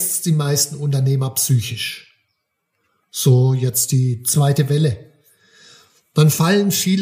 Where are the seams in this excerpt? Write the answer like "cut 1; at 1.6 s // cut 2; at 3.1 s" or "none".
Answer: cut 1; at 3.0 s